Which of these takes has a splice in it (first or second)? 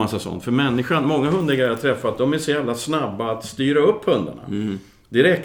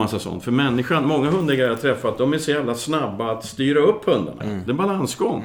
second